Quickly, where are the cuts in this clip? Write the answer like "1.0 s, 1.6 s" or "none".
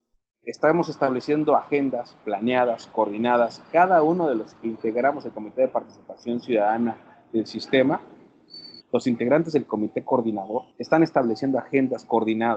8.8 s, 10.7 s